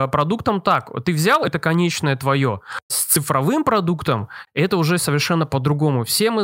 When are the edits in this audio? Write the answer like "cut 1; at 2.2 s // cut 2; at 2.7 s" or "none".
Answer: cut 1; at 2.9 s